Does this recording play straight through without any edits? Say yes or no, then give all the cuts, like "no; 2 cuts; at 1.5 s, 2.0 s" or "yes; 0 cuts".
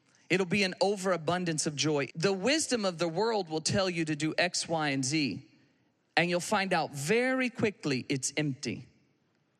no; 1 cut; at 2.1 s